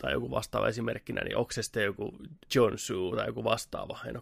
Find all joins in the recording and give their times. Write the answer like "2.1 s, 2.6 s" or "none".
2.4 s